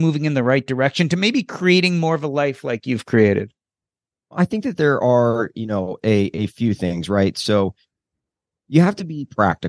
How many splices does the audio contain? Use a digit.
0